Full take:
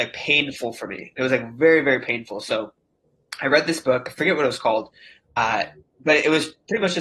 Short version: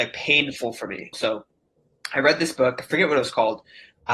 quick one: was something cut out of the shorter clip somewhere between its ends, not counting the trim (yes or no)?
yes